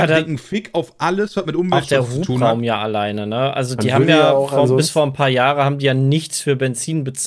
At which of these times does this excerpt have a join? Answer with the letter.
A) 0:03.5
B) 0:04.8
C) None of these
C